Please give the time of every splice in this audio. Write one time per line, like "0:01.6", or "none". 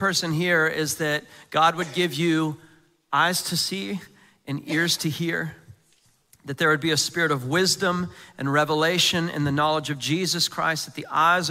none